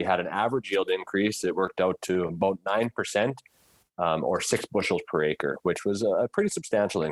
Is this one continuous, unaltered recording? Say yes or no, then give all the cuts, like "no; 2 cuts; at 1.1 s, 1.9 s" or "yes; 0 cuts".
yes; 0 cuts